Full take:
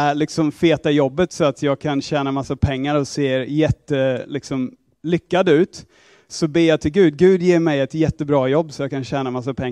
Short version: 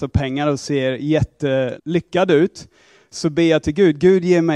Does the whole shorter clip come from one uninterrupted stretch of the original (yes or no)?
no